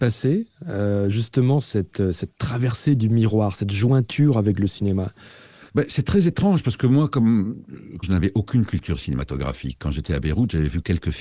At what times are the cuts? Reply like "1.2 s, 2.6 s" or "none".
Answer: 8.0 s